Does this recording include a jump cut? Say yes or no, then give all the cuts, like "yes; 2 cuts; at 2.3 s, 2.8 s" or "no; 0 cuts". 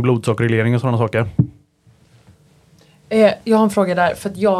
no; 0 cuts